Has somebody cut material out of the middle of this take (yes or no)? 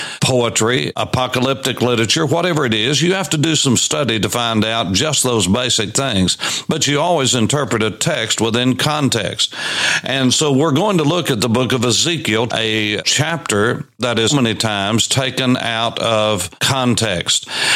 yes